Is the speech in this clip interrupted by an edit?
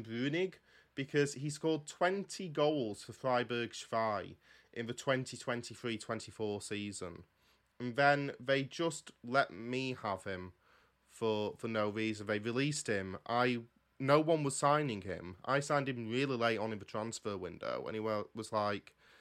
no; 0 cuts

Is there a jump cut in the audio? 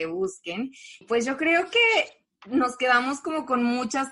yes; 1 cut; at 1.0 s

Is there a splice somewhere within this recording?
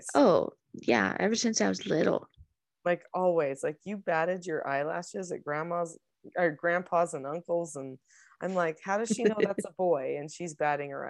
no; 0 cuts

